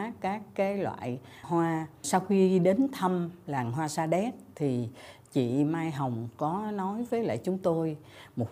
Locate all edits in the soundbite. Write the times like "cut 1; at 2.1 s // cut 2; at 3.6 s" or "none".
cut 1; at 1.4 s